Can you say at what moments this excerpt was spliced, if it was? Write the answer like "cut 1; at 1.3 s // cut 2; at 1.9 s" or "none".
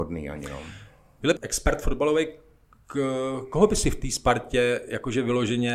cut 1; at 1.4 s